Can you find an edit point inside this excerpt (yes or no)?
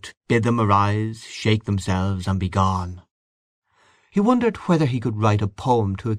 no